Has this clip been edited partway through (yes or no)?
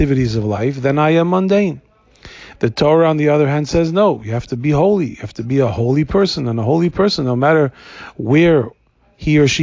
no